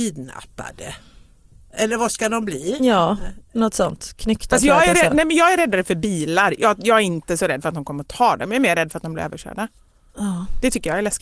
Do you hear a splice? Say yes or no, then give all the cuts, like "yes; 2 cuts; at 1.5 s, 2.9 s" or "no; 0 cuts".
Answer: no; 0 cuts